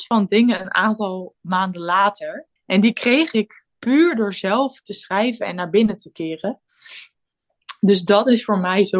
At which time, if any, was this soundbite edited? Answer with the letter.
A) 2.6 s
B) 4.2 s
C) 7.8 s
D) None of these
A